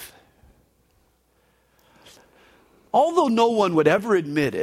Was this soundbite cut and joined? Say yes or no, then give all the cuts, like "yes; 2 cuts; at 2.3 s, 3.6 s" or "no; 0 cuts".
no; 0 cuts